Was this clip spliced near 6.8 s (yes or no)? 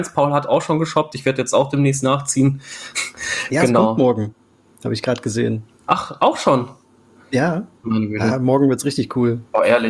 no